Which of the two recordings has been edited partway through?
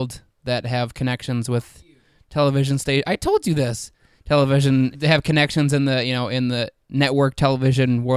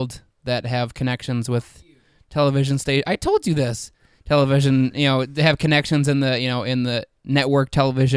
first; 1 cut; at 4.9 s

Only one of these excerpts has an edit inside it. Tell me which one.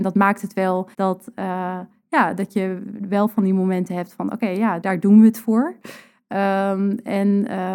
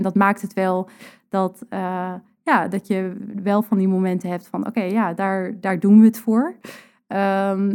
first; 2 cuts; at 0.9 s, 4.8 s

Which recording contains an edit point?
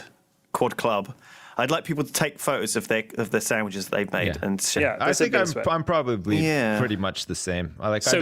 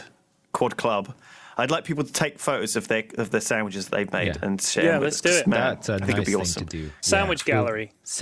first; 1 cut; at 4.8 s

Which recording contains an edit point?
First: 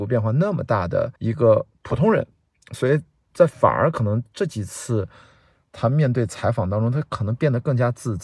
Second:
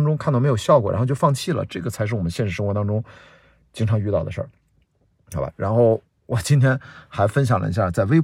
first; 1 cut; at 1.2 s

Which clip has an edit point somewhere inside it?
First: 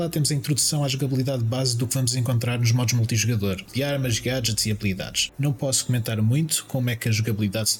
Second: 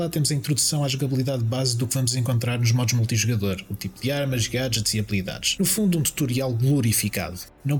first; 2 cuts; at 3.7 s, 5.3 s

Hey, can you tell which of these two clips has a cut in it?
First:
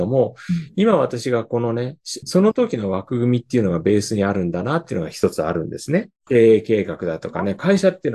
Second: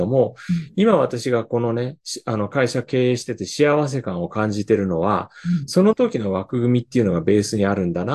first; 2 cuts; at 2.2 s, 6.3 s

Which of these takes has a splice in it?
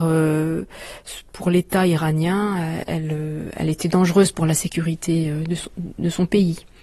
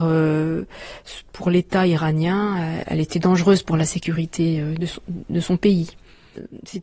second; 1 cut; at 2.9 s

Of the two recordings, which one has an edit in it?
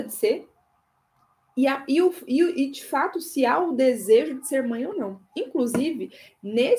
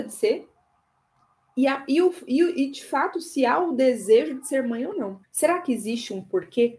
second; 1 cut; at 5.2 s

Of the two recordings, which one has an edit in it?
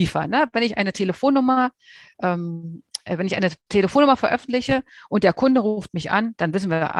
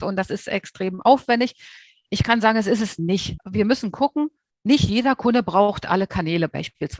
second; 1 cut; at 3.4 s

